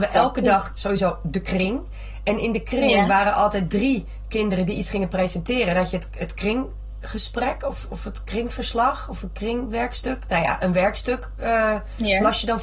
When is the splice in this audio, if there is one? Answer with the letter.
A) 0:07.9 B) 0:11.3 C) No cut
C